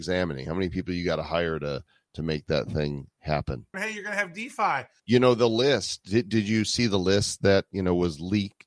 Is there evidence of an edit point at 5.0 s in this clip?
yes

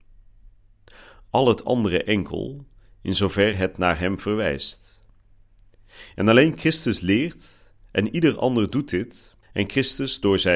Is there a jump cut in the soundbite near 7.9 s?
no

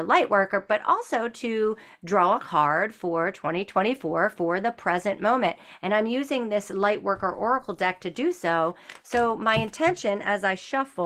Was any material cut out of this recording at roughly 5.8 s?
no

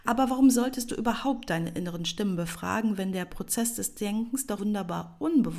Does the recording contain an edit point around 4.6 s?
yes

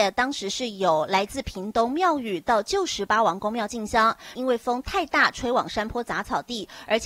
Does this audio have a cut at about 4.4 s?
yes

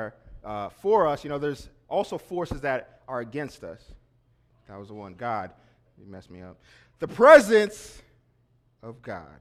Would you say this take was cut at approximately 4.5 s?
yes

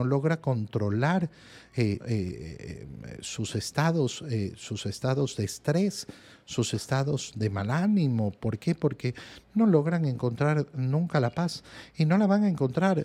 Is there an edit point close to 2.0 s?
yes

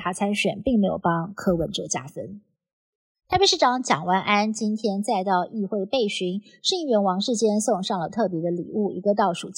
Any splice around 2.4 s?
no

